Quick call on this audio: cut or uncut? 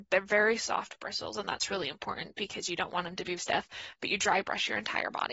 cut